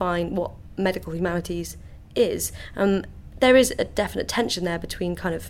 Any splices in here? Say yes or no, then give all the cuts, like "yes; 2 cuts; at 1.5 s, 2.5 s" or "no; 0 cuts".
no; 0 cuts